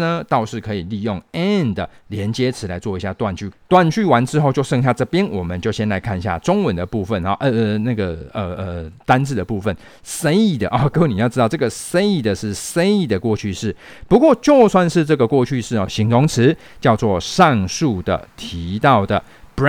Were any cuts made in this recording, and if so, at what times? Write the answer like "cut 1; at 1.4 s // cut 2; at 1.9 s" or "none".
cut 1; at 3.5 s // cut 2; at 15.9 s

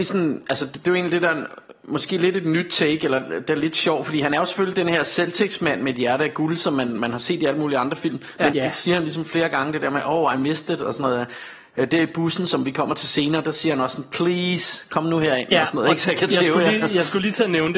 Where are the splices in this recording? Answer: cut 1; at 8.5 s

